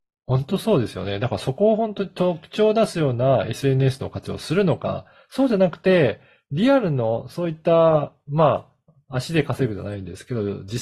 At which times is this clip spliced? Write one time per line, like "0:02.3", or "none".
none